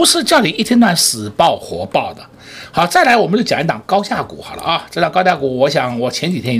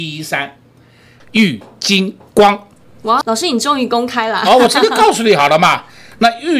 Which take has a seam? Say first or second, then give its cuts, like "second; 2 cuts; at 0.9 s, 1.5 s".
second; 2 cuts; at 1.2 s, 3.2 s